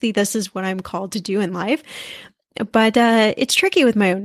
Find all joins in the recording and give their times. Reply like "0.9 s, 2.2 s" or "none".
none